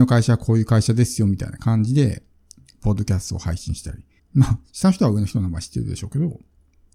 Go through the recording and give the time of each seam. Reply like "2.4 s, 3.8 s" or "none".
4.2 s